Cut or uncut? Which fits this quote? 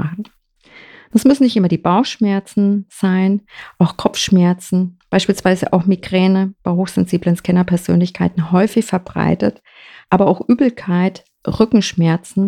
uncut